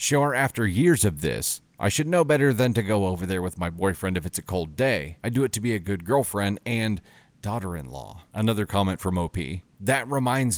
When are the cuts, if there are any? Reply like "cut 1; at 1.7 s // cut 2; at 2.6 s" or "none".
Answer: none